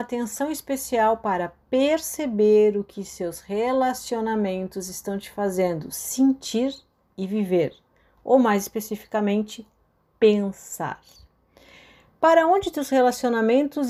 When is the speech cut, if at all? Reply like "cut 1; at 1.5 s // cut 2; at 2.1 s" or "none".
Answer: none

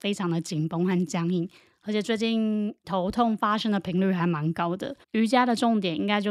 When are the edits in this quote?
cut 1; at 2.8 s // cut 2; at 5.0 s

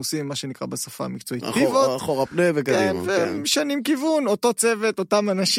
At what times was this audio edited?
none

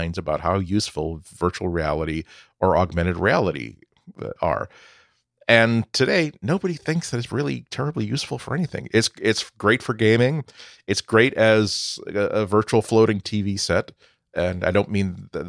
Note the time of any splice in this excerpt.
none

